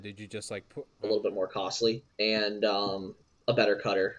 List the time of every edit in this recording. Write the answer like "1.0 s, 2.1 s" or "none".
1.0 s, 2.1 s